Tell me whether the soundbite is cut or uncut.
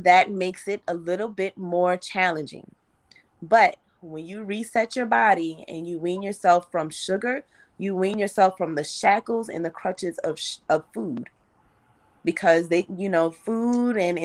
uncut